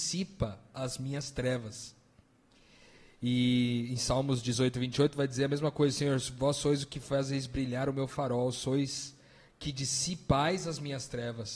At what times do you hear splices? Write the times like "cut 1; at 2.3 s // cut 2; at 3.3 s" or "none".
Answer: none